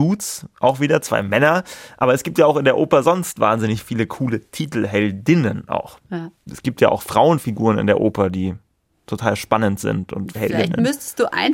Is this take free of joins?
yes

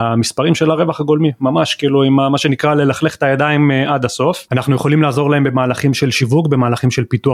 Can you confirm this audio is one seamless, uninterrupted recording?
yes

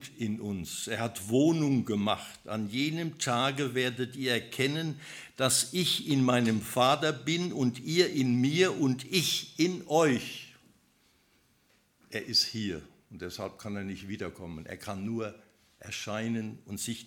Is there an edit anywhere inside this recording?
no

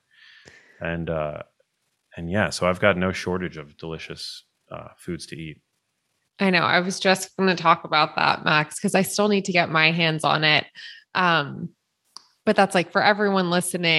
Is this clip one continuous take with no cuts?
yes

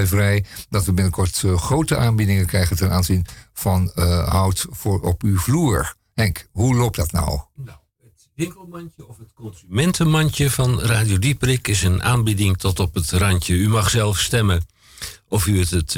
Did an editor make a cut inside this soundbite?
no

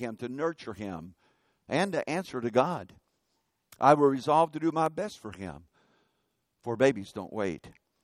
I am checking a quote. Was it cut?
no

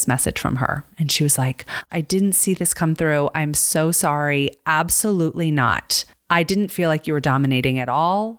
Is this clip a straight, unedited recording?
no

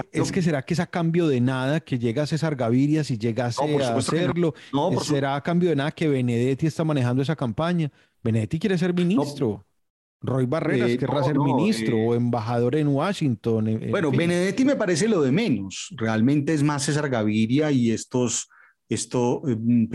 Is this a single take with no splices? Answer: yes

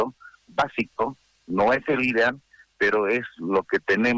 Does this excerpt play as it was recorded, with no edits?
yes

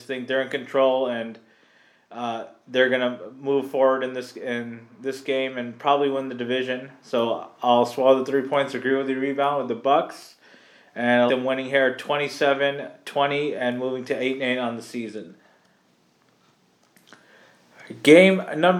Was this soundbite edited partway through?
yes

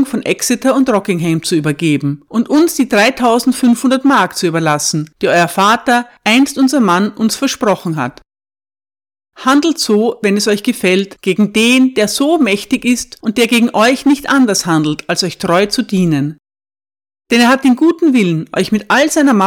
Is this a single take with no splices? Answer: yes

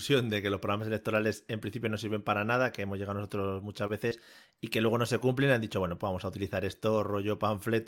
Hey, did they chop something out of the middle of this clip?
no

